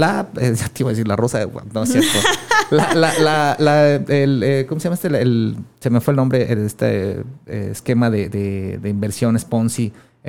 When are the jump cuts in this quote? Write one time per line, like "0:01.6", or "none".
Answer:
none